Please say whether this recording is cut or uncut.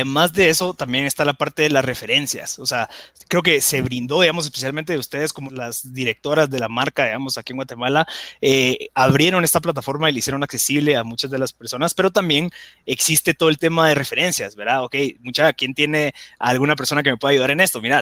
cut